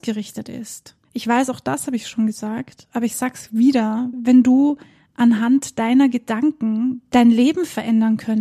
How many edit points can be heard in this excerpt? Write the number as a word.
two